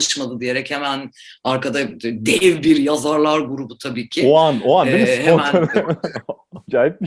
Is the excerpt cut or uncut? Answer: uncut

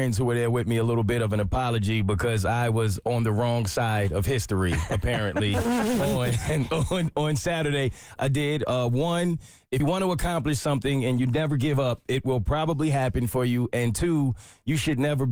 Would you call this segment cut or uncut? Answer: cut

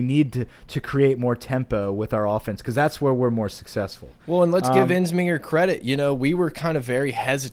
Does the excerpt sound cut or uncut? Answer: uncut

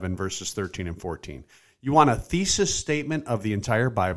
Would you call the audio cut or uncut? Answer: uncut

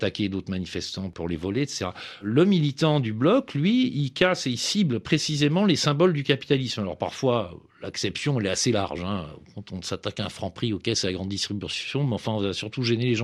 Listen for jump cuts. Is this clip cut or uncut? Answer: uncut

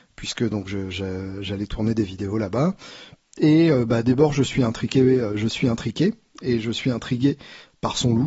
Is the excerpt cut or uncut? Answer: uncut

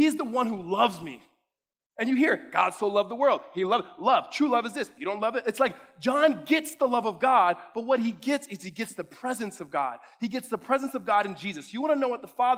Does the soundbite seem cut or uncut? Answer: uncut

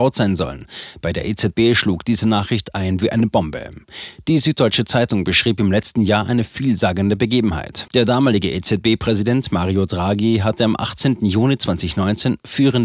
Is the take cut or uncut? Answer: cut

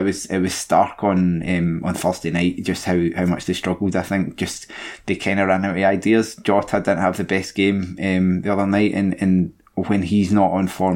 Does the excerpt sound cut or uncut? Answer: uncut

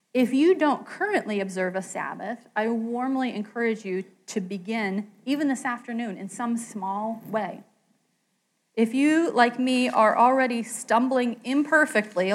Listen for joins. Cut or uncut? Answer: uncut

